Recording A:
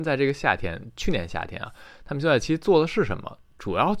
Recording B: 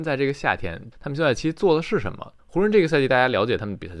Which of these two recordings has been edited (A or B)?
B